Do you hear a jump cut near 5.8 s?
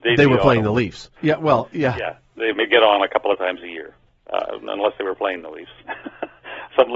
yes; 2 cuts; at 1.2 s, 5.8 s

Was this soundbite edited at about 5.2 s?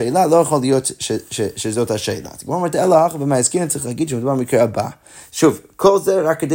no; 0 cuts

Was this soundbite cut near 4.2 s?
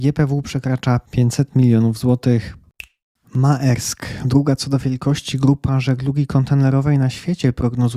no; 0 cuts

